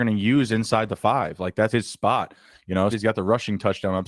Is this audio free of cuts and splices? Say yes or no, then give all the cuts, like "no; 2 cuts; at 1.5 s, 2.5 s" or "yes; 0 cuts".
no; 2 cuts; at 1.7 s, 2.9 s